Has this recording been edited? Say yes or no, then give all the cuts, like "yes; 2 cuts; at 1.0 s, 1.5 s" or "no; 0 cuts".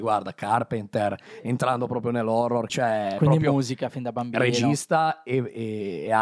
yes; 1 cut; at 2.7 s